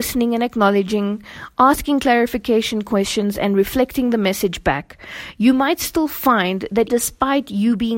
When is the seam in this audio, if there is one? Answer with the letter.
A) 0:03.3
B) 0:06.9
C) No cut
B